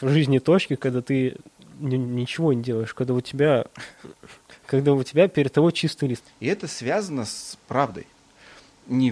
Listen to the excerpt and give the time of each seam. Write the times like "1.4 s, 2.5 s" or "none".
6.2 s